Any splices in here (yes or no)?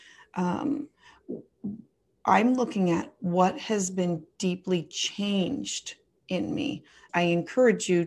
yes